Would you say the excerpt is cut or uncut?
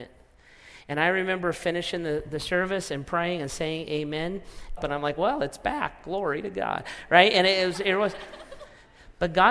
cut